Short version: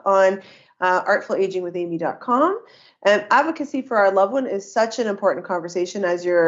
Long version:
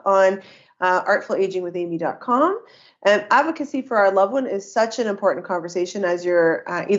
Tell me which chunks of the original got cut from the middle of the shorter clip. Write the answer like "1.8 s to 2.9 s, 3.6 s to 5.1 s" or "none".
none